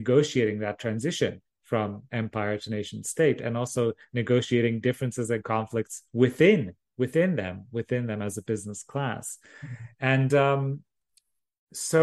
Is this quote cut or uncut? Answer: uncut